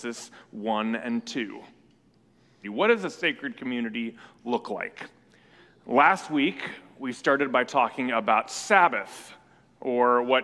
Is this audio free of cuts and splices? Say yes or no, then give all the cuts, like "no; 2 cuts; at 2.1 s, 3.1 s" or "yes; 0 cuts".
no; 1 cut; at 2.6 s